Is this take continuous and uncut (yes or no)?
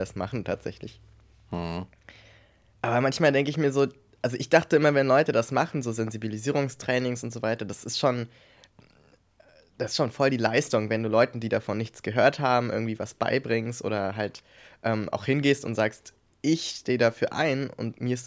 yes